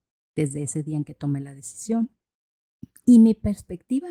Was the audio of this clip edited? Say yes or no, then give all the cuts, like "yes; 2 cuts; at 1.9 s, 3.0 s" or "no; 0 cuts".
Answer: no; 0 cuts